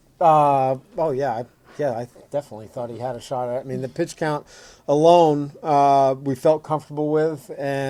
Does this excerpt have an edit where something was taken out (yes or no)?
no